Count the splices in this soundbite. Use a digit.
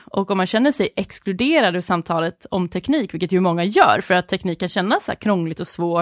0